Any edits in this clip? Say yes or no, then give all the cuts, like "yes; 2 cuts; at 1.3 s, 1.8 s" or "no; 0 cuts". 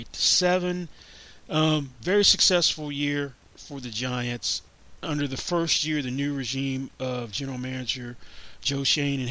no; 0 cuts